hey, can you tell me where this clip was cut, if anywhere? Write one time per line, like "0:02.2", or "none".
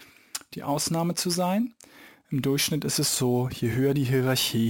none